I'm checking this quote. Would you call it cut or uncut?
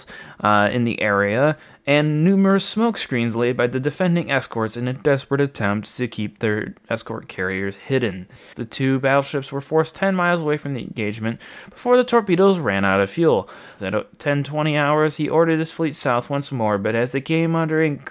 cut